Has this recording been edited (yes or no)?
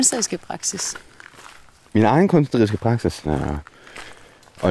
yes